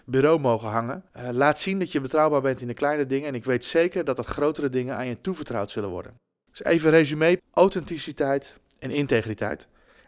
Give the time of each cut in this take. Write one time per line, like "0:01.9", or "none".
0:01.1
0:07.4